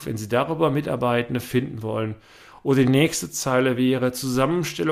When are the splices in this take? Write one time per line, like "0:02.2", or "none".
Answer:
none